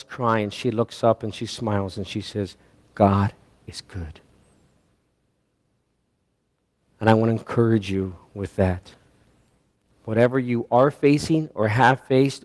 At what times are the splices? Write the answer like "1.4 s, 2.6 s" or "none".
none